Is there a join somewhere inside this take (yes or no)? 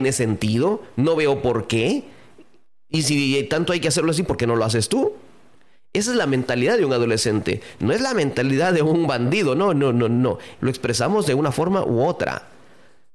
yes